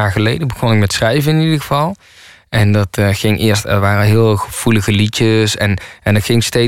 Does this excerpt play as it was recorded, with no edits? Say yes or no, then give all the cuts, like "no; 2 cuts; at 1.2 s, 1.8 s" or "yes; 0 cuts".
yes; 0 cuts